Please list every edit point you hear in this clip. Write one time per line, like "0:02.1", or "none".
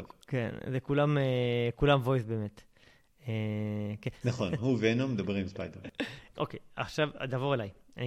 0:04.2
0:06.3